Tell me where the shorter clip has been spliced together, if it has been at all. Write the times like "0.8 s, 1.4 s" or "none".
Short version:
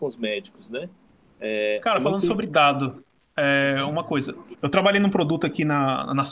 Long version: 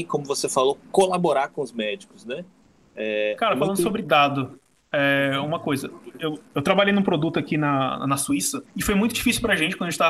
4.5 s